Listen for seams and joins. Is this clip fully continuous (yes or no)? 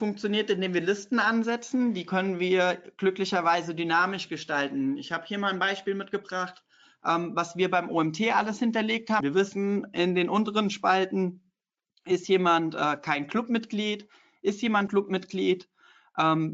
no